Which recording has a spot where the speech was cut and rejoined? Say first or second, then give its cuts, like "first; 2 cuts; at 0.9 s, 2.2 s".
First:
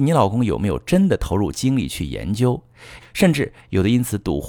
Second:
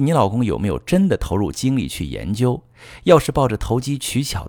first; 1 cut; at 3.0 s